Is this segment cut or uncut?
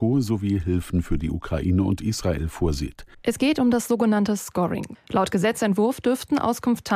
cut